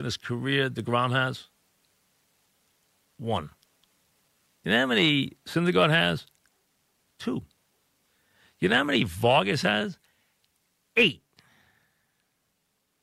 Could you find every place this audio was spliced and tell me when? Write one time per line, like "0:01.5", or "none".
none